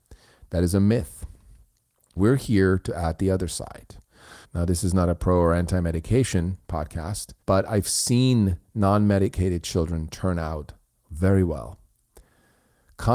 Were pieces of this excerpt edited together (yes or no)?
yes